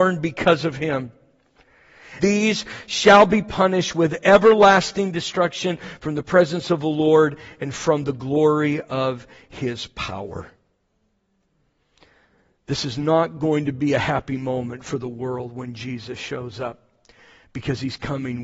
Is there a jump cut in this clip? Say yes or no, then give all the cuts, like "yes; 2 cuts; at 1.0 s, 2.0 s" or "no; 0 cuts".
yes; 1 cut; at 2.2 s